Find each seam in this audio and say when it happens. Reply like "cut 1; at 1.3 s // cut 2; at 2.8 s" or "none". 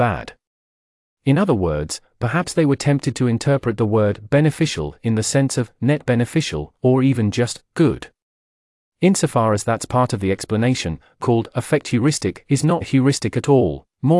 cut 1; at 11.2 s // cut 2; at 12.8 s